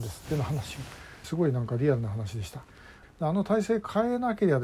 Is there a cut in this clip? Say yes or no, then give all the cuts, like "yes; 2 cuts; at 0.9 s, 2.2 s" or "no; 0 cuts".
yes; 2 cuts; at 1.2 s, 3.0 s